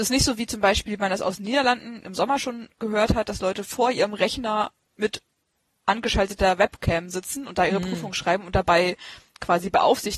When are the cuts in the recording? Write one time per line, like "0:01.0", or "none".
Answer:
none

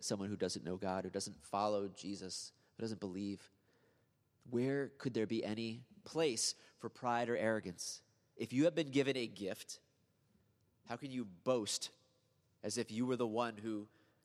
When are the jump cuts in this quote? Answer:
none

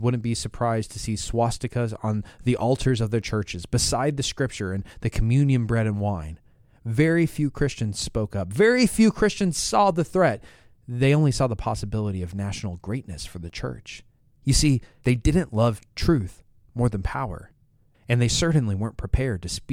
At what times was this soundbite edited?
none

